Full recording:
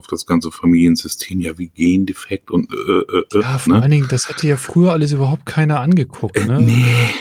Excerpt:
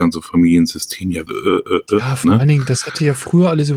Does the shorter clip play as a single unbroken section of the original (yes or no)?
no